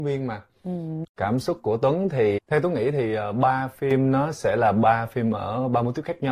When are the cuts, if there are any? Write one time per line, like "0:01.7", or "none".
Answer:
0:01.0
0:02.4